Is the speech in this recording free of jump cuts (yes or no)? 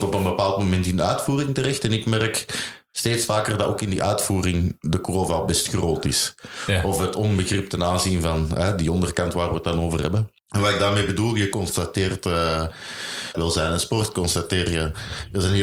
no